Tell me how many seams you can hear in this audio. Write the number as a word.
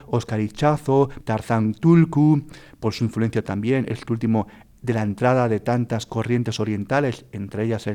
one